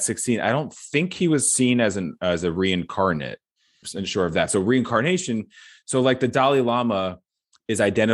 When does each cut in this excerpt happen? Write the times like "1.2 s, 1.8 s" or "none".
3.8 s

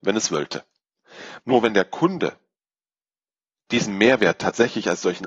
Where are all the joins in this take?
1.4 s

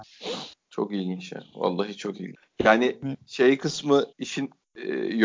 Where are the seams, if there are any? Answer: 4.1 s

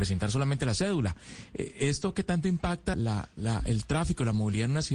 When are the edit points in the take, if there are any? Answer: 2.9 s

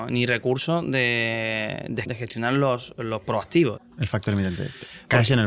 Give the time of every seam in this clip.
2.0 s, 3.8 s

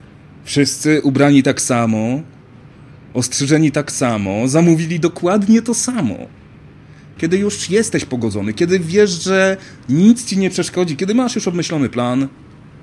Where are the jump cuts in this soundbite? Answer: 7.2 s

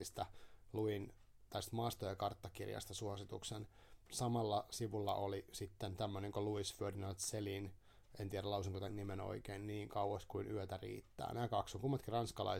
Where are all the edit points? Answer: 4.1 s

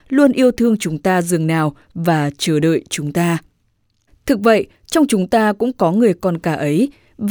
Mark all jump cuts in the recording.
4.1 s

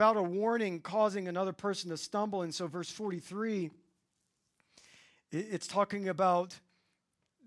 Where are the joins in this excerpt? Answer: none

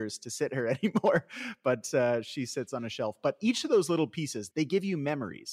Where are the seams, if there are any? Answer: 4.5 s

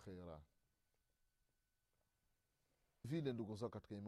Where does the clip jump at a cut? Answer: 3.0 s

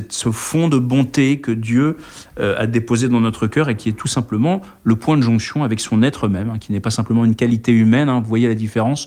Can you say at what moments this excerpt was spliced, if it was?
none

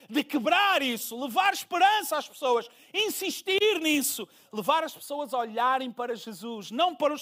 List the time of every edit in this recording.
none

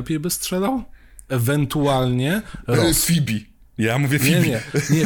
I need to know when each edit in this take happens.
none

